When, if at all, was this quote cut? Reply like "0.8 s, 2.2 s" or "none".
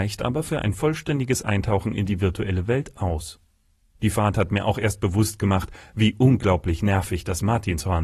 3.9 s